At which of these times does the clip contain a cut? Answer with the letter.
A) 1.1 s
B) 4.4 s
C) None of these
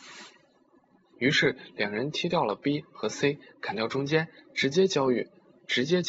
A